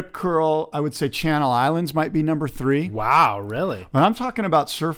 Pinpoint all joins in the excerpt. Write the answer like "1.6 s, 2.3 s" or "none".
none